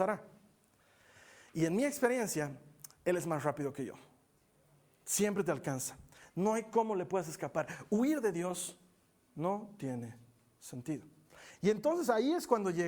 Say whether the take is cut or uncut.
cut